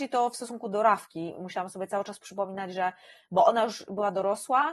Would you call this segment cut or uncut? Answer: uncut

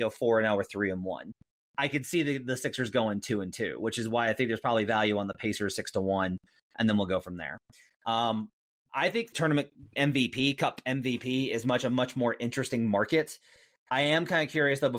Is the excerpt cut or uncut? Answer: uncut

